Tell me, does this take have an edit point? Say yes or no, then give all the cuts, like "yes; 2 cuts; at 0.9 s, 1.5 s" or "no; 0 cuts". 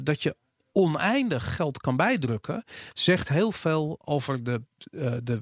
no; 0 cuts